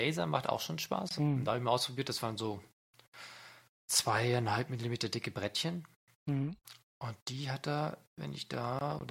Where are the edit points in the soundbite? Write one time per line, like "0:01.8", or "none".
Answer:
0:01.2